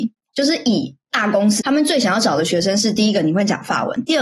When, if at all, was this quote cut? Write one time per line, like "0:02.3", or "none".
0:01.6